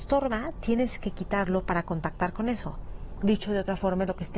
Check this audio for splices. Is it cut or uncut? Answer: cut